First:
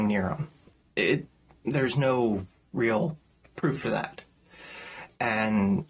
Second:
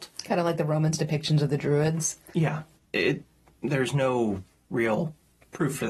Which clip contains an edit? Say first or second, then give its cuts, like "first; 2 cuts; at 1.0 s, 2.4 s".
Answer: second; 1 cut; at 2.8 s